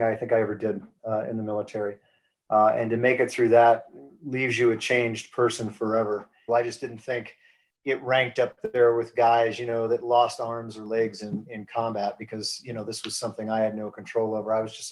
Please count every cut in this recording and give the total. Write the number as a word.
one